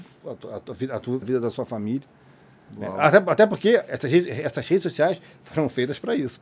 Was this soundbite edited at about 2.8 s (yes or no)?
no